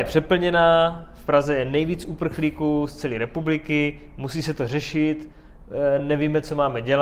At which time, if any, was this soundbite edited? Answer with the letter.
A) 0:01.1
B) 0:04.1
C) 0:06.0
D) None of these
D